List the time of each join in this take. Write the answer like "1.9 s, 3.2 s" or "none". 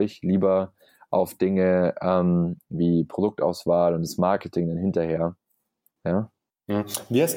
6.0 s